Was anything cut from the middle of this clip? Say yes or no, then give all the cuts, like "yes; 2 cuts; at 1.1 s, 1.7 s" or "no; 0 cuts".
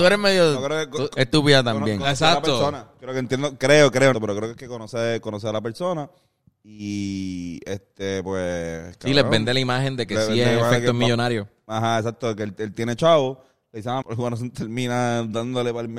yes; 2 cuts; at 4.1 s, 14.0 s